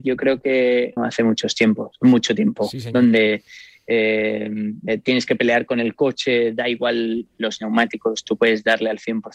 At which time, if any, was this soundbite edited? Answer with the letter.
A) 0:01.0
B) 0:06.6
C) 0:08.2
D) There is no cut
A